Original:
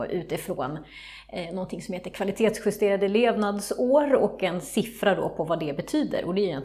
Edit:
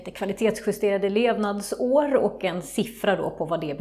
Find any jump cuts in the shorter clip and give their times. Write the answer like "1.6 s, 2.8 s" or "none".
none